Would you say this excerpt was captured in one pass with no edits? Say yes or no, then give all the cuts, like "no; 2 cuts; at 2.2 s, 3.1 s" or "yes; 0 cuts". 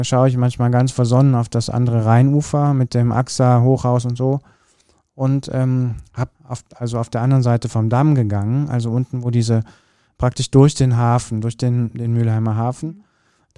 no; 1 cut; at 6.3 s